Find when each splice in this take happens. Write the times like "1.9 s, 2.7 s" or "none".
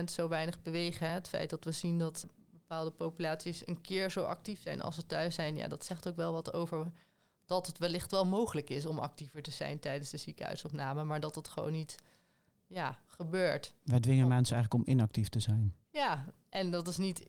none